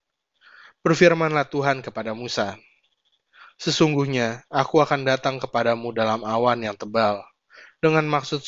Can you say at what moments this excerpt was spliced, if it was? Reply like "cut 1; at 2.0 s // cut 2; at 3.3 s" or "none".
none